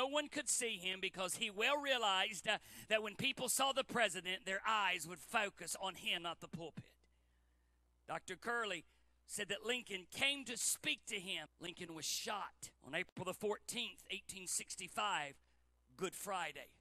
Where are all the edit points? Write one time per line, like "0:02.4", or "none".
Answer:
0:11.5
0:12.8